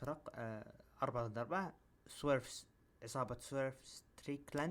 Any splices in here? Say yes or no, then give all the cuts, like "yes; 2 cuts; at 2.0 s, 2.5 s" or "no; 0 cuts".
no; 0 cuts